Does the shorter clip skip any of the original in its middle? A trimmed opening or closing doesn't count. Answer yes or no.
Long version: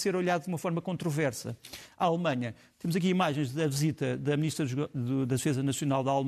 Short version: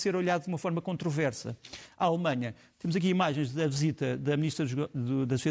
no